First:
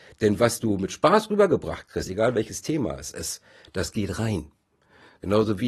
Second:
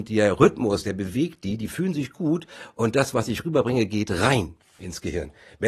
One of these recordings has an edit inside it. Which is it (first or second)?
first